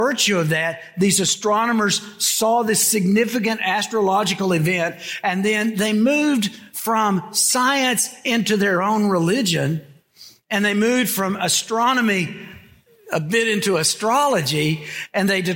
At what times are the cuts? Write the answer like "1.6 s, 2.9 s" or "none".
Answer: none